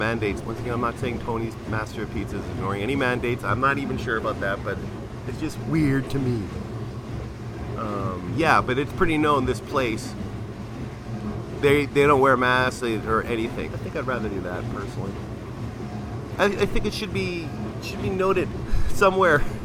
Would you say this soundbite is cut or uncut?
cut